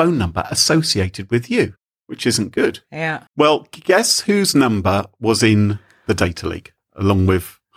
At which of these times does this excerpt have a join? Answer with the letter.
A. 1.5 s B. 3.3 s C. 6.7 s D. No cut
B